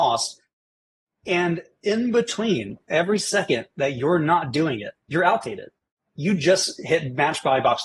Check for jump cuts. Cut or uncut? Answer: cut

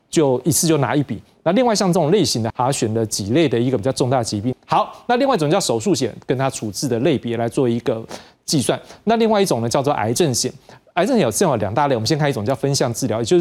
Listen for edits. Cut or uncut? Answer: cut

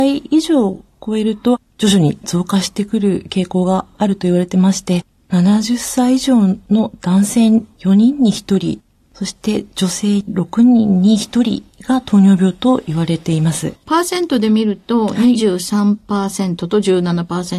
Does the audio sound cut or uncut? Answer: uncut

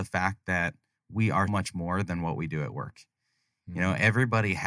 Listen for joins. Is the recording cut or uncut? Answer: cut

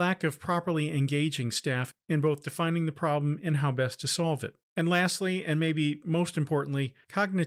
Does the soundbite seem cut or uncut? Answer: cut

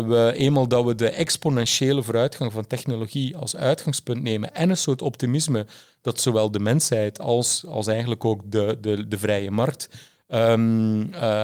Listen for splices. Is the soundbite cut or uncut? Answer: uncut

